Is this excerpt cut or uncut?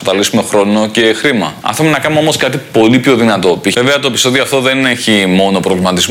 cut